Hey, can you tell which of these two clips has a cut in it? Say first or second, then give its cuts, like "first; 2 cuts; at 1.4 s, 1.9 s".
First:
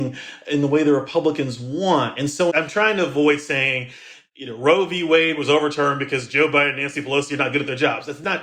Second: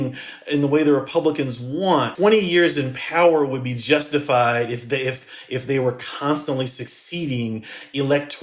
second; 1 cut; at 2.2 s